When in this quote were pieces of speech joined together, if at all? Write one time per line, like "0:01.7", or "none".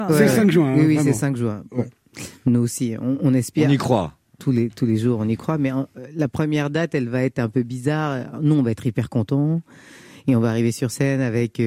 none